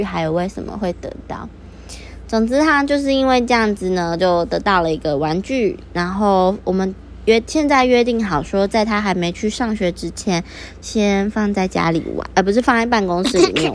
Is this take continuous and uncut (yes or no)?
yes